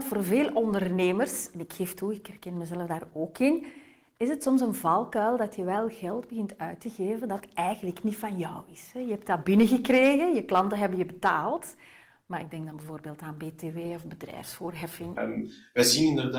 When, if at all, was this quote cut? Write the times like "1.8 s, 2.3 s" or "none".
15.2 s